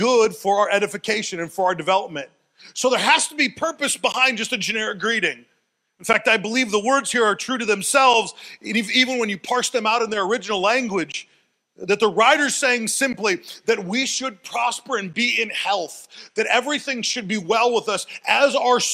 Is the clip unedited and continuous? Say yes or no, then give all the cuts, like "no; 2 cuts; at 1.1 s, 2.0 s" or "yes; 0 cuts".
yes; 0 cuts